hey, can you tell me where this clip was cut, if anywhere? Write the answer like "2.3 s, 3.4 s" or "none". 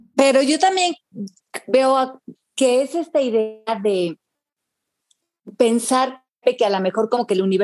2.3 s